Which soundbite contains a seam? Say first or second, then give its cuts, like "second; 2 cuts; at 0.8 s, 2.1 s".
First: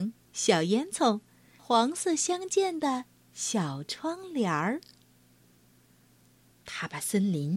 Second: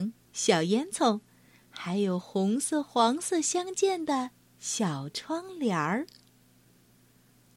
first; 2 cuts; at 1.6 s, 6.5 s